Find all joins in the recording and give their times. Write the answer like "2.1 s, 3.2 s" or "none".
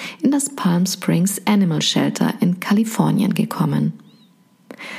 none